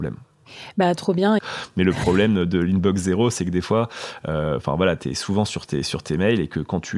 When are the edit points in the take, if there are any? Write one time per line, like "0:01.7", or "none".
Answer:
0:01.4

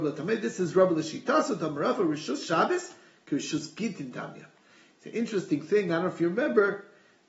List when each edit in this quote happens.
none

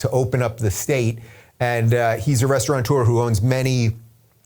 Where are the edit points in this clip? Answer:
none

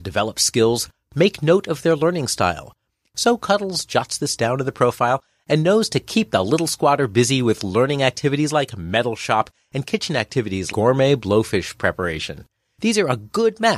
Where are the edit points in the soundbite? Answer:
0:03.1
0:10.7

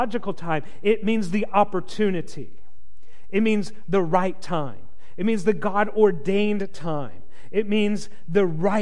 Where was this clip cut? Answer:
none

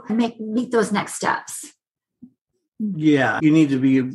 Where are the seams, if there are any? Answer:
none

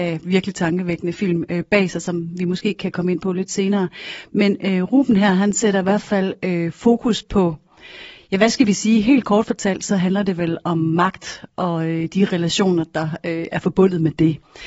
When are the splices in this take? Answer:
none

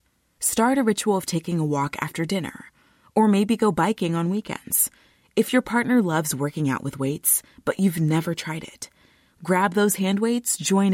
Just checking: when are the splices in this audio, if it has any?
none

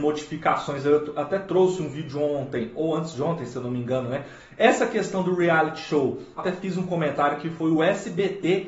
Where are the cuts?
0:04.4
0:06.4

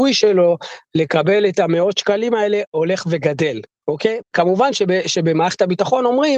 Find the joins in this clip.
0:04.2

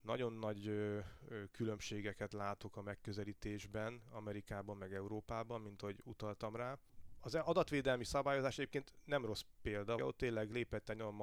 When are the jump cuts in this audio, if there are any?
0:10.0

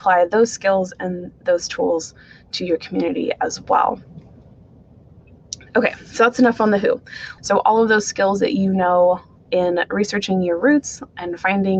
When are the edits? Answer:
0:07.4

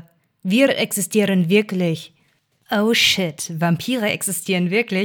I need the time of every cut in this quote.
none

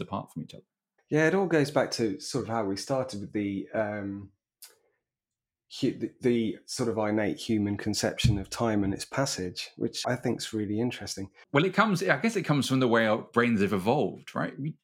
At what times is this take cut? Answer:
0:10.0

